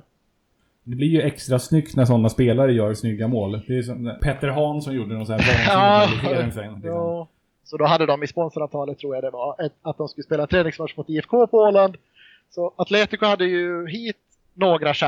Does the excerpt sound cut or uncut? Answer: cut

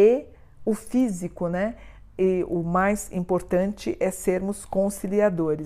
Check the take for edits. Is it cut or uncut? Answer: uncut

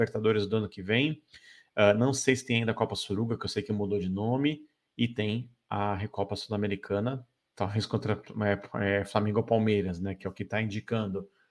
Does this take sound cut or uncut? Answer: uncut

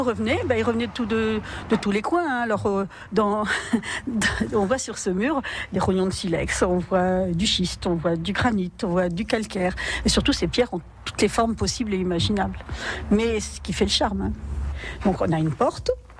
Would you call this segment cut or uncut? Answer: uncut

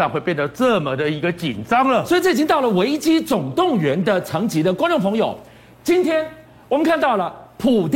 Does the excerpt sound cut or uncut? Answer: uncut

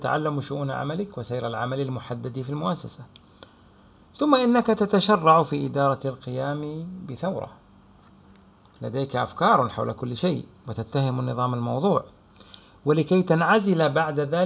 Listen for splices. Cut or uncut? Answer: uncut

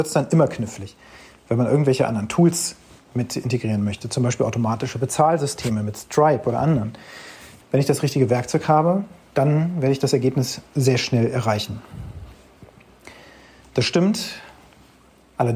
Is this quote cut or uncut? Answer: cut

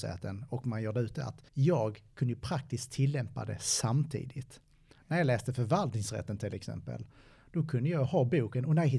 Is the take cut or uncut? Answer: cut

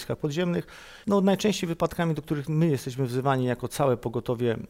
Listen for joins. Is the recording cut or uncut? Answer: cut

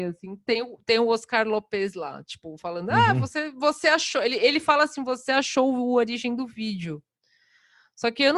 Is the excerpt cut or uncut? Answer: uncut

